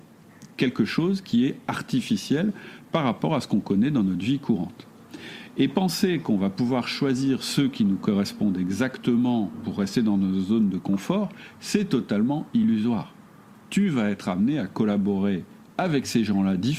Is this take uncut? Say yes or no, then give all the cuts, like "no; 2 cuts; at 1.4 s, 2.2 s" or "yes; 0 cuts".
yes; 0 cuts